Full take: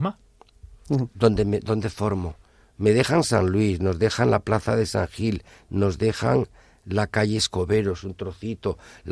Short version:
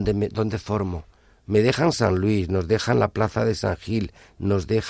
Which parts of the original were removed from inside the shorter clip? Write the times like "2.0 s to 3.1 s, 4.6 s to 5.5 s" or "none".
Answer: none